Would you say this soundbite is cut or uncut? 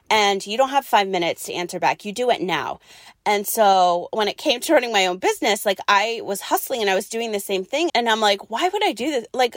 cut